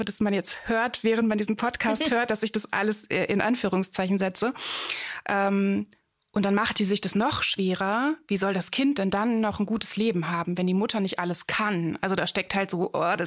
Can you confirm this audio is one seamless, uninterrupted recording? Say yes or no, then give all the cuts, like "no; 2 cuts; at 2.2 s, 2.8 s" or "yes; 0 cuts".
yes; 0 cuts